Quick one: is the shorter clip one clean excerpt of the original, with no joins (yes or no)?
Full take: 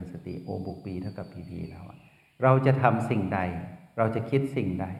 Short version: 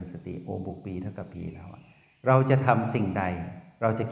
no